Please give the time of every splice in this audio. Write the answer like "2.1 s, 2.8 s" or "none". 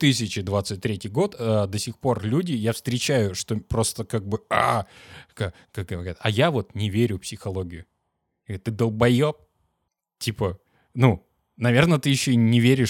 none